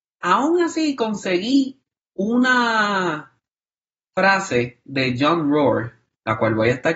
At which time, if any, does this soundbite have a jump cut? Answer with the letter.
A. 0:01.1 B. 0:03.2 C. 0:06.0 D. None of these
D